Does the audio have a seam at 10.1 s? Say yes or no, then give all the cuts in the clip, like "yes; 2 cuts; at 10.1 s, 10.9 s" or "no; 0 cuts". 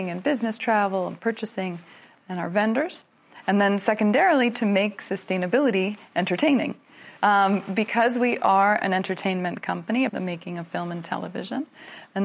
yes; 3 cuts; at 3.4 s, 7.2 s, 10.1 s